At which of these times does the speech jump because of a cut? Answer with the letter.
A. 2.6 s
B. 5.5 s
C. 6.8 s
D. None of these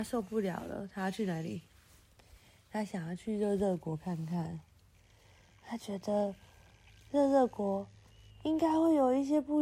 D